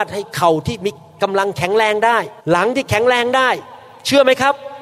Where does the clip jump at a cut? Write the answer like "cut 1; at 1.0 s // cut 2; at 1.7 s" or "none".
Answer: cut 1; at 2.4 s